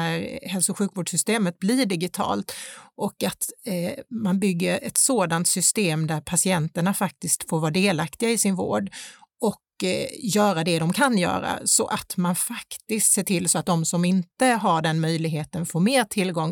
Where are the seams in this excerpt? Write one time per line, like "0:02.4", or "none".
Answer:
none